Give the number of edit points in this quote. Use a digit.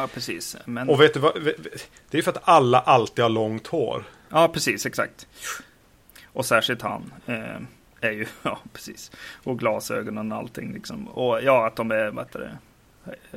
0